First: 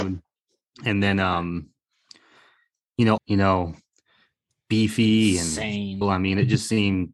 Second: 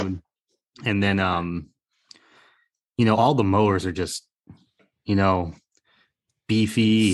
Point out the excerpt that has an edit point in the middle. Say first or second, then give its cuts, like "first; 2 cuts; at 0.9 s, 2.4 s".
first; 2 cuts; at 3.2 s, 6.0 s